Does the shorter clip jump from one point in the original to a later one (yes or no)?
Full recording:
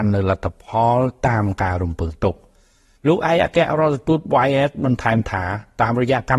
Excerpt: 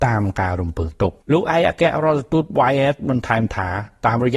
yes